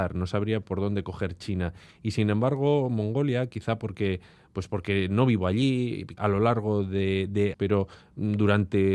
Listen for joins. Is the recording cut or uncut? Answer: cut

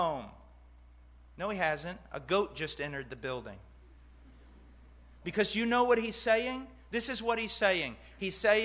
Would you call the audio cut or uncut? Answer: uncut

